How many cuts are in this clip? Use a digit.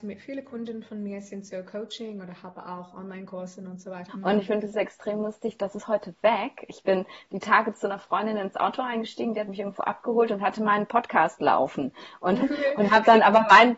2